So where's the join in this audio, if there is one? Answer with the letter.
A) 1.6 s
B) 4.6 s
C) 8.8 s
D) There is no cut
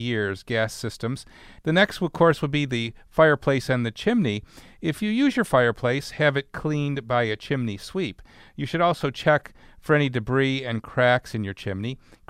A